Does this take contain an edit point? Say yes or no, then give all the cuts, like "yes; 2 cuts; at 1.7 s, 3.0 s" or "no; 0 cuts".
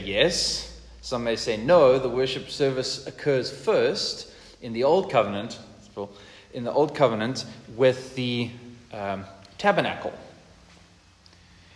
no; 0 cuts